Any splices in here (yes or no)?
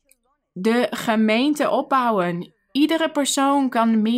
no